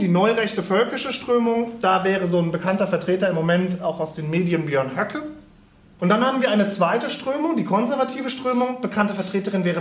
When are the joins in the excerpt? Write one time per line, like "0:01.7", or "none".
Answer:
0:06.0